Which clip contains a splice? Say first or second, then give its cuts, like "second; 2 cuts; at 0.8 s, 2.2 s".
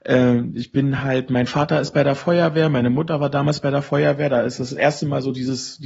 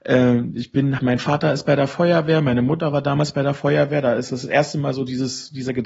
second; 1 cut; at 1.0 s